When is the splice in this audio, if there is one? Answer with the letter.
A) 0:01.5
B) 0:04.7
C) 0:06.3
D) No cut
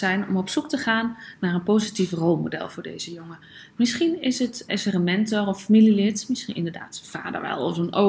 B